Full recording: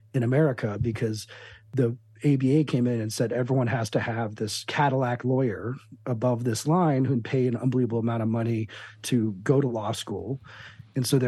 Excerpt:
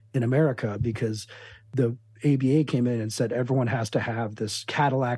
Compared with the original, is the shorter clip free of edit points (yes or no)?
yes